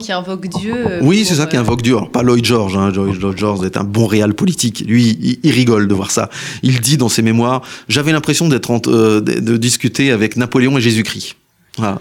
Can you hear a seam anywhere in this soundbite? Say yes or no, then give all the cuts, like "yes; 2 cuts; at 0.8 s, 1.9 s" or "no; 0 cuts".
no; 0 cuts